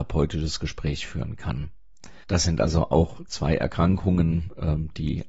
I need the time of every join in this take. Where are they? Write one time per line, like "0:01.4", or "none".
0:02.2